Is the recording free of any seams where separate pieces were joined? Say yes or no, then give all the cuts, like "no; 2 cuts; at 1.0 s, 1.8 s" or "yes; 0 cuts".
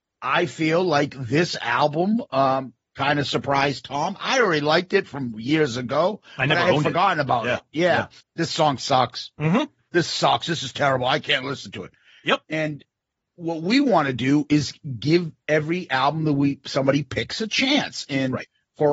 no; 1 cut; at 8.2 s